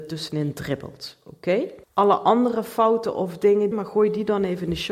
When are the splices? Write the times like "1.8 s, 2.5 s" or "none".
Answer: 1.8 s, 3.7 s